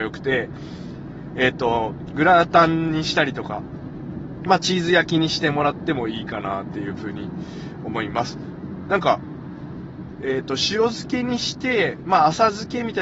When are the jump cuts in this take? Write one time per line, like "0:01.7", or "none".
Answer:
none